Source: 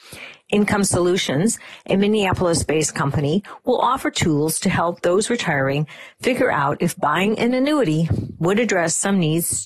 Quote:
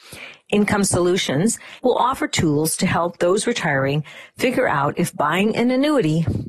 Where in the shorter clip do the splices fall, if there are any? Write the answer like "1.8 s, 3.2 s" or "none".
1.8 s